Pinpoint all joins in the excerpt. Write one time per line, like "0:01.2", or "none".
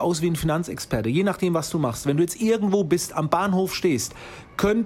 none